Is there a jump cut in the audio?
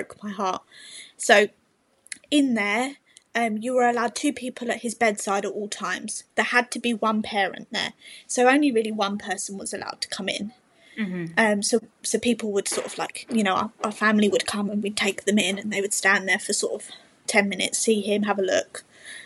no; 0 cuts

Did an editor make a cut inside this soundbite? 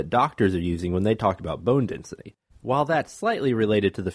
yes; 1 cut; at 2.5 s

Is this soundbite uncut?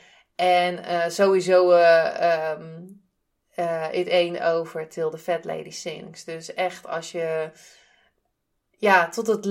yes; 0 cuts

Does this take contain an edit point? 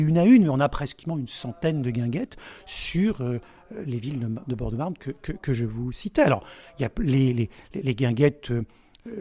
no; 0 cuts

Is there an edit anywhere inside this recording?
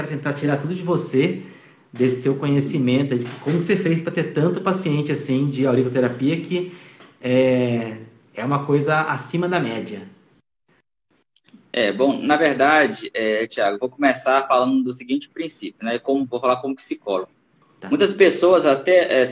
no; 0 cuts

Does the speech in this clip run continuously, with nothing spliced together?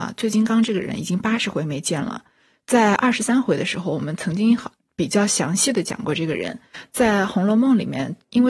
yes; 0 cuts

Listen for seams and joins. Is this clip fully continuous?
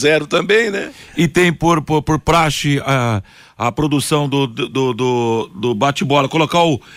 yes; 0 cuts

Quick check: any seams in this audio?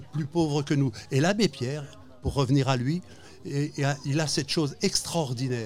no; 0 cuts

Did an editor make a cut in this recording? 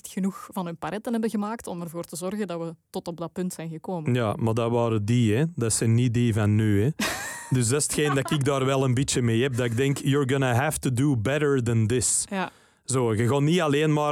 no; 0 cuts

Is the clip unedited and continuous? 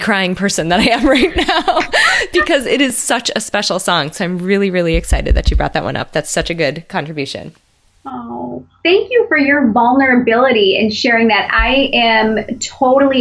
yes; 0 cuts

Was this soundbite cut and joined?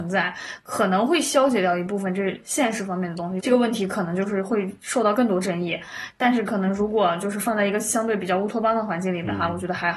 yes; 1 cut; at 3.4 s

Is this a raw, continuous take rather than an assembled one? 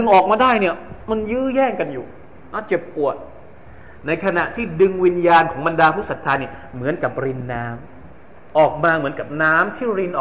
no; 1 cut; at 8.5 s

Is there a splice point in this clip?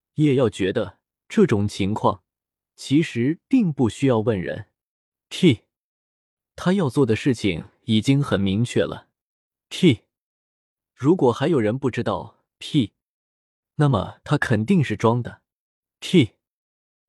no; 0 cuts

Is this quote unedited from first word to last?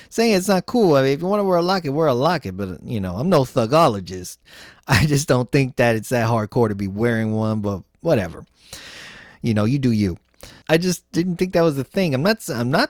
no; 1 cut; at 10.6 s

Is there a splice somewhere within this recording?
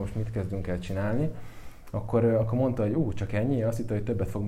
no; 0 cuts

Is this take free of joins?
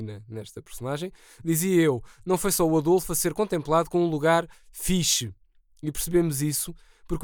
yes; 0 cuts

